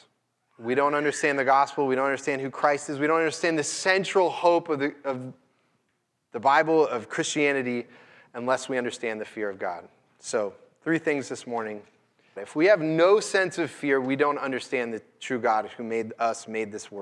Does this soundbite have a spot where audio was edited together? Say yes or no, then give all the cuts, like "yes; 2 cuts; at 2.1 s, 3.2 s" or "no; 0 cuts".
yes; 1 cut; at 12.4 s